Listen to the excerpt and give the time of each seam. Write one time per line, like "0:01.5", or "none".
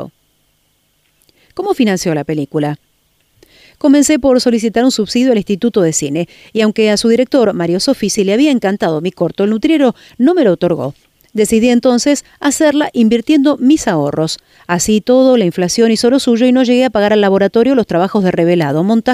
none